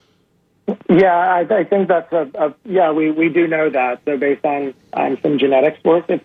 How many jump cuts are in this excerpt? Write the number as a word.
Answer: one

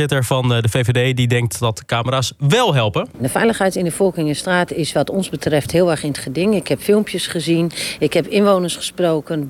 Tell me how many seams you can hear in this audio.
zero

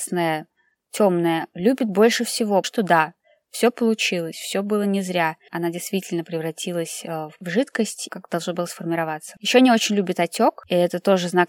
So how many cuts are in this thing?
three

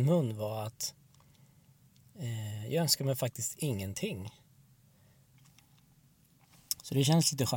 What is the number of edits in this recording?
one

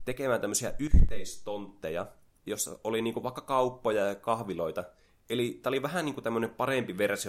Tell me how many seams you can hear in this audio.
zero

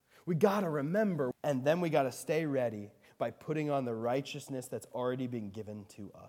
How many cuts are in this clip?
one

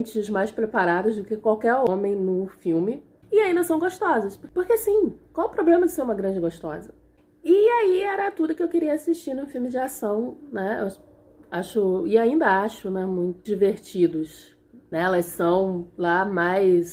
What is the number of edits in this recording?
two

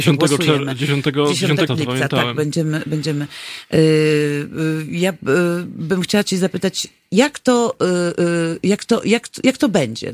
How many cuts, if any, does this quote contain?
one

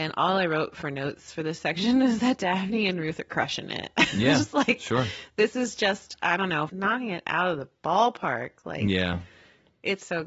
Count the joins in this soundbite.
one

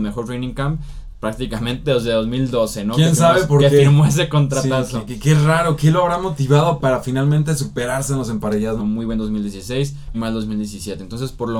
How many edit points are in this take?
two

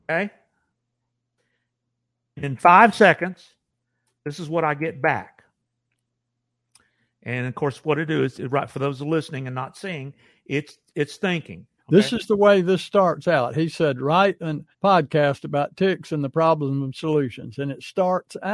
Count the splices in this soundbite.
two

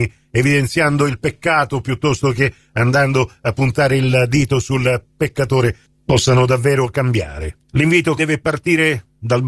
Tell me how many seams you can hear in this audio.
one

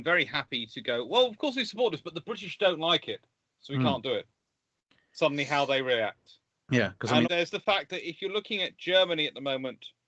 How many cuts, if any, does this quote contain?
one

